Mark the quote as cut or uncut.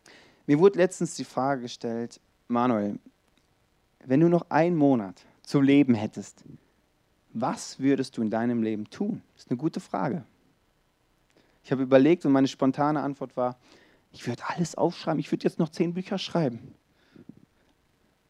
cut